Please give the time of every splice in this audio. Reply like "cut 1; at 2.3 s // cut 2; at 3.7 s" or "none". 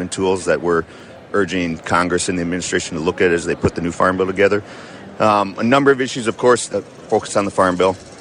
cut 1; at 5.2 s // cut 2; at 6.7 s

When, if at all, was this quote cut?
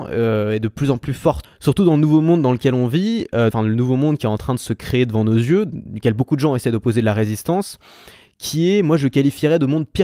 cut 1; at 1.4 s // cut 2; at 3.5 s

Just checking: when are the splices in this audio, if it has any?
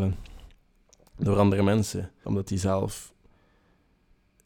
cut 1; at 2.2 s

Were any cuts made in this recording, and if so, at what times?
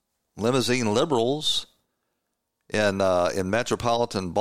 none

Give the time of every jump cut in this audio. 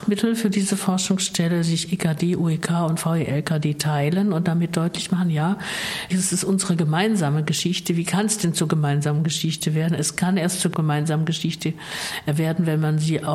cut 1; at 6.1 s

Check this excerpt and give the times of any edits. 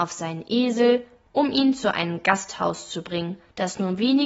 none

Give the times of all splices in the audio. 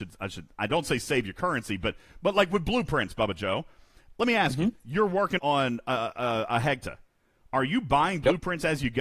cut 1; at 5.4 s

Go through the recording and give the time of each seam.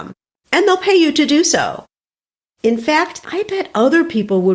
cut 1; at 3.2 s

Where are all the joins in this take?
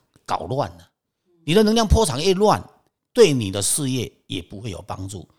cut 1; at 3.0 s

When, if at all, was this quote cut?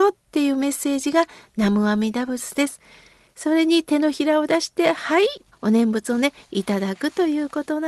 cut 1; at 5.5 s

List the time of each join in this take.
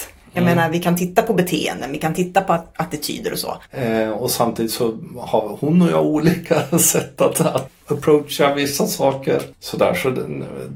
cut 1; at 3.7 s // cut 2; at 7.7 s

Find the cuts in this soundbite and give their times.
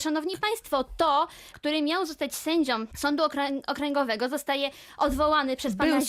cut 1; at 1.5 s

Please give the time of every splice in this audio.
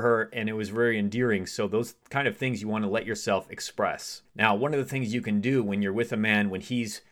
cut 1; at 4.3 s

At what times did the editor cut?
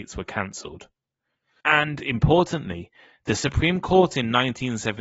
cut 1; at 1.6 s

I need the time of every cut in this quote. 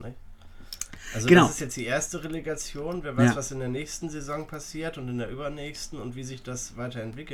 none

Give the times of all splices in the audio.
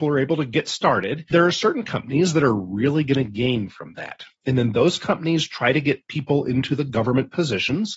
cut 1; at 1.3 s

